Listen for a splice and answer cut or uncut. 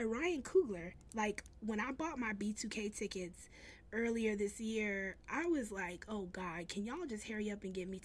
cut